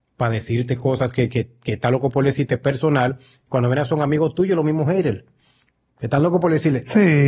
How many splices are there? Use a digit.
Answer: 0